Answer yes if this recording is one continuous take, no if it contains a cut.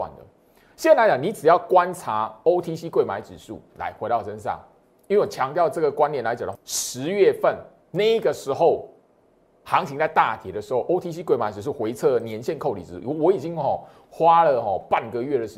no